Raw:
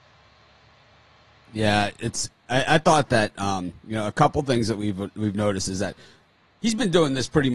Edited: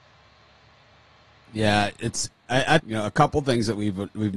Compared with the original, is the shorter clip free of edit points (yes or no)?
no